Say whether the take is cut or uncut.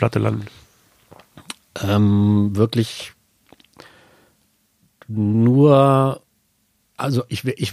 uncut